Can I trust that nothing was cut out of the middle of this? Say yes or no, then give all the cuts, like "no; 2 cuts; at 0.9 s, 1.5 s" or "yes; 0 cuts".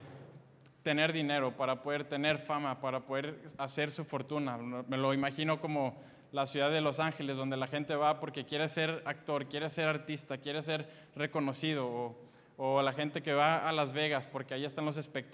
yes; 0 cuts